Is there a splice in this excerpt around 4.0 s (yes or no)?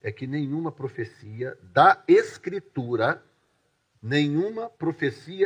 yes